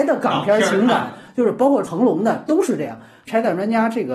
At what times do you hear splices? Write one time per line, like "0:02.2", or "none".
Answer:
none